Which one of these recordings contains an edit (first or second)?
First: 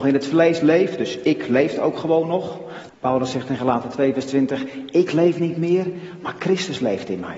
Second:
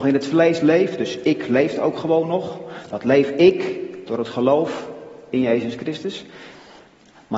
first